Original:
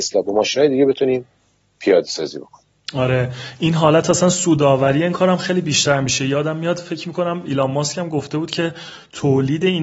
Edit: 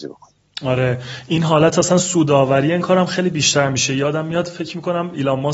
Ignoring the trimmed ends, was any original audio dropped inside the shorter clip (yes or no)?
no